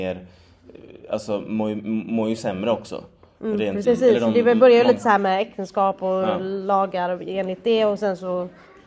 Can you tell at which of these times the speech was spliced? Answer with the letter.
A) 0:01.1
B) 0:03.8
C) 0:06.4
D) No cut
B